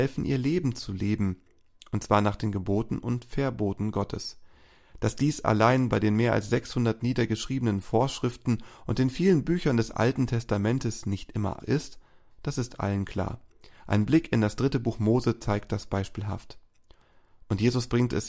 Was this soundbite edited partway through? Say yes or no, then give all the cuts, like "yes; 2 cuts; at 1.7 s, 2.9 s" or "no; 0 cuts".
yes; 1 cut; at 11.6 s